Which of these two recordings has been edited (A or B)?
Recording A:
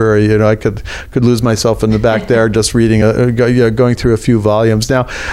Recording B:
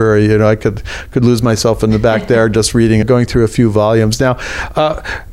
B